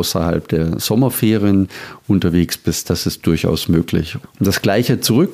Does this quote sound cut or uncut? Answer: cut